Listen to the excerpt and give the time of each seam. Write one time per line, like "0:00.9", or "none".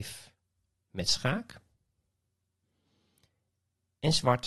none